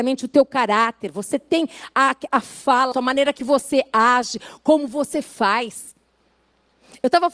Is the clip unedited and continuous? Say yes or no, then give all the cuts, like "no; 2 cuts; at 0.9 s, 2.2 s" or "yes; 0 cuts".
no; 1 cut; at 2.9 s